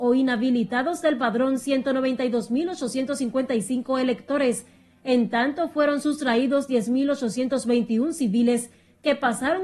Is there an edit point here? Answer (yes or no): no